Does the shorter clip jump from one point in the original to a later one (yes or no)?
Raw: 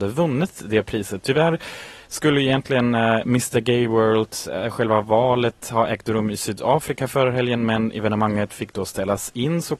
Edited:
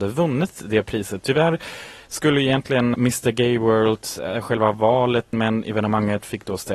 yes